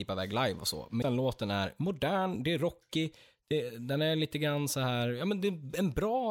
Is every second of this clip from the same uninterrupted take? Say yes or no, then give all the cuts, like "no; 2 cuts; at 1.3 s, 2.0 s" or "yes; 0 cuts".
no; 1 cut; at 1.0 s